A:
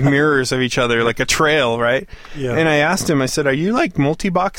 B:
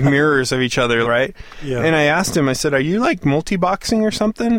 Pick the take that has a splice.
B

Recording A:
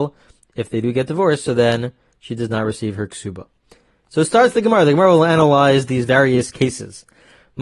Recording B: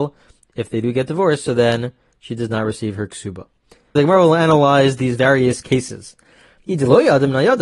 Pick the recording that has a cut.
B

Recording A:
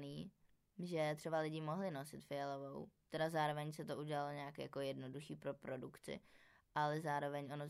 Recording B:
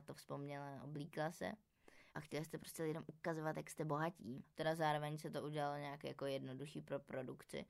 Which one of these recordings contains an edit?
B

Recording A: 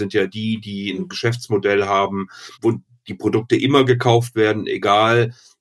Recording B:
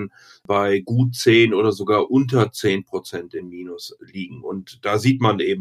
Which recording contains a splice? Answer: A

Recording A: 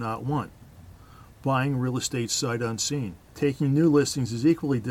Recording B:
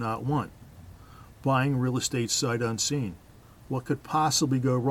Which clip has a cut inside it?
A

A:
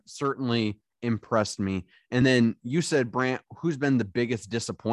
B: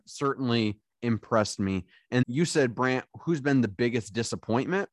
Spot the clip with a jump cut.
B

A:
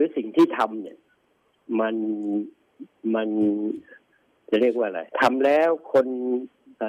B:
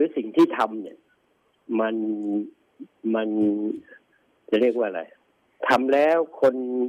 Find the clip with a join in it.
A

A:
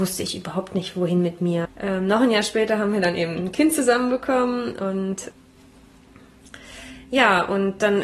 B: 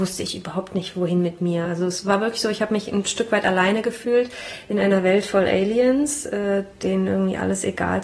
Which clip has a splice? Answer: A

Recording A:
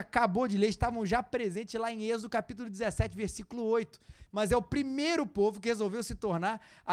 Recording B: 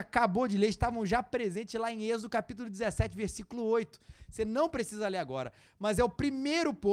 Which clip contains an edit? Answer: A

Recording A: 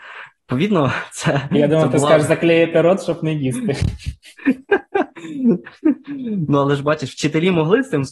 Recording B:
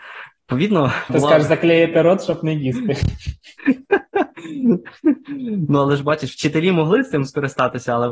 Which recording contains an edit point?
B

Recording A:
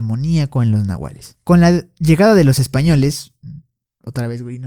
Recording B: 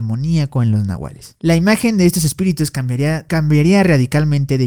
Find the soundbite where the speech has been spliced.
B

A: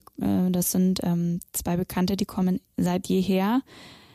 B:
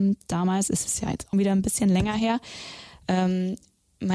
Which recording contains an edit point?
B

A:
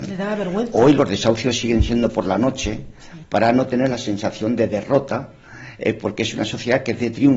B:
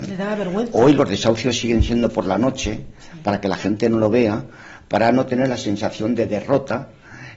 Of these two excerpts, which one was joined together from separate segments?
A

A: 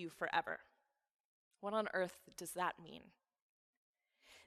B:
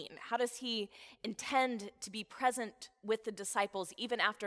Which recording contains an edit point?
A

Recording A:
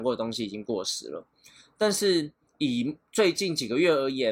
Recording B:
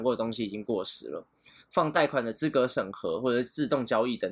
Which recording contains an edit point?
B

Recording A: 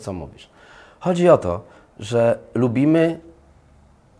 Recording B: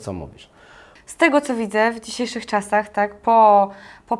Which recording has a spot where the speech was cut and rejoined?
B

